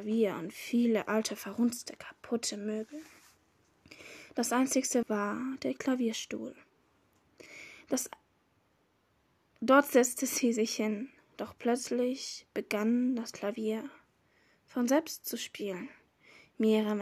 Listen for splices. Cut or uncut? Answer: cut